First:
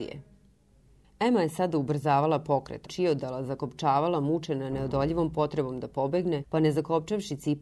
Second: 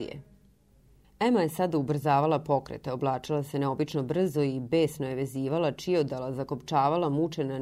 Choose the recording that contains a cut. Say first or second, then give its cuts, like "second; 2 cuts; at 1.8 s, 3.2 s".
first; 1 cut; at 2.8 s